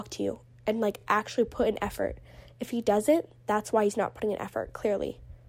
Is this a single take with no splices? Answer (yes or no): yes